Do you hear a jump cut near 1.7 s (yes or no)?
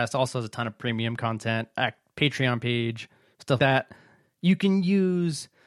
no